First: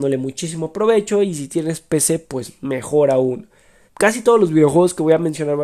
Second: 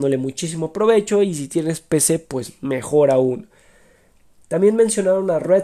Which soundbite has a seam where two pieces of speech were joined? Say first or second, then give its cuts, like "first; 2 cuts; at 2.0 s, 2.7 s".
first; 1 cut; at 3.9 s